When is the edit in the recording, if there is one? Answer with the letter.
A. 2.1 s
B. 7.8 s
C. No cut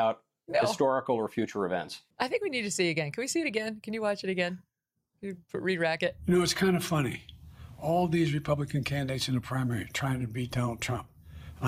A